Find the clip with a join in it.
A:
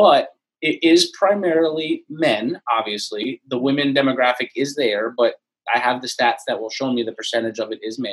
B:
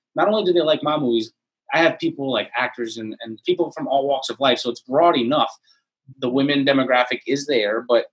B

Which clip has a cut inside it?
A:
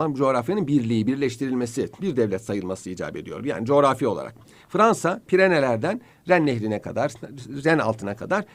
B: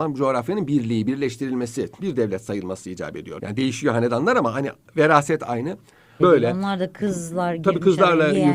B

